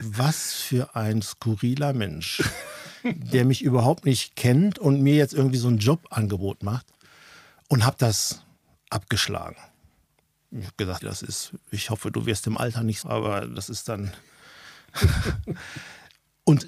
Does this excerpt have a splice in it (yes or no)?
yes